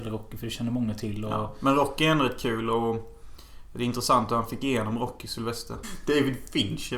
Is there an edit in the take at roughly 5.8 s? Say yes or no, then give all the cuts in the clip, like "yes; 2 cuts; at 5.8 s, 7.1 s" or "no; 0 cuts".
yes; 1 cut; at 5.8 s